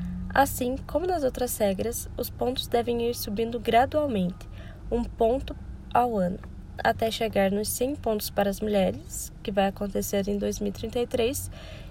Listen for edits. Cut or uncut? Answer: uncut